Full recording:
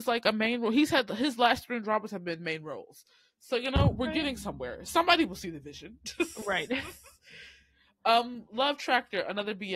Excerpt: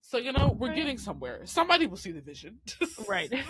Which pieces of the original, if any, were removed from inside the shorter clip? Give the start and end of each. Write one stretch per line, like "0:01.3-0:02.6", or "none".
none